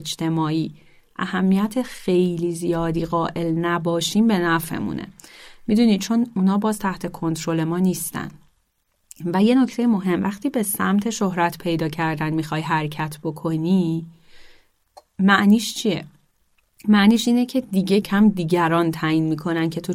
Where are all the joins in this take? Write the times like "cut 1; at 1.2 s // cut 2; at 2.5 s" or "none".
cut 1; at 18.0 s

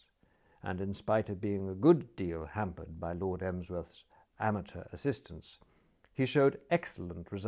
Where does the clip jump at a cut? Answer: none

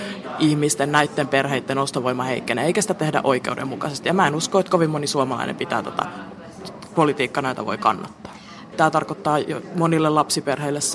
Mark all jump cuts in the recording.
cut 1; at 8.7 s

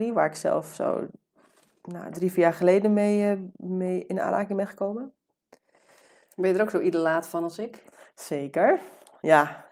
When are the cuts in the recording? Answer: none

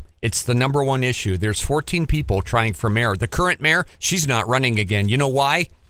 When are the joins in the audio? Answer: none

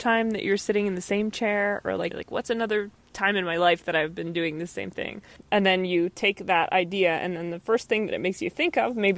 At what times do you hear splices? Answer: cut 1; at 2.1 s // cut 2; at 5.4 s

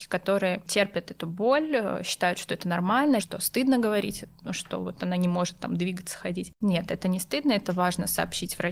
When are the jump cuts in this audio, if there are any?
cut 1; at 3.2 s

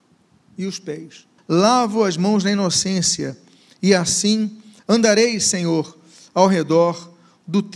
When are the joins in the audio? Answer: cut 1; at 1.4 s

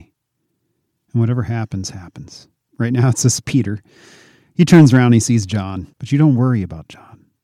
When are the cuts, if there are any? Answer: cut 1; at 2.7 s // cut 2; at 5.9 s

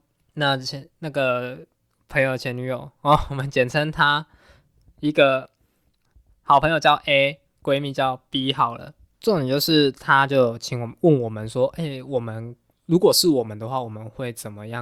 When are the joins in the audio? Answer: cut 1; at 9.1 s

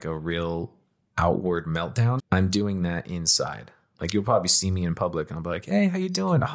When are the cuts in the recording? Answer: cut 1; at 2.2 s // cut 2; at 3.9 s

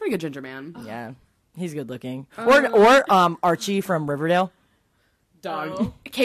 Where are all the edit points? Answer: none

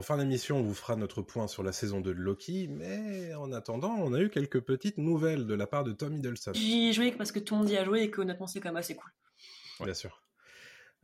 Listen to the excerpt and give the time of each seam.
cut 1; at 6.5 s

